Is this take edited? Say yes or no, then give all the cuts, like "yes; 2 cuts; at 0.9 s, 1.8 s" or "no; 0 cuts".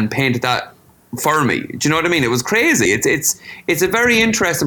no; 0 cuts